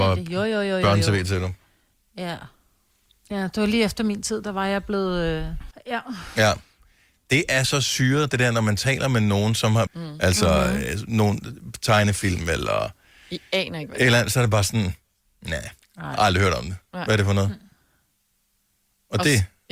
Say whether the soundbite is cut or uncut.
cut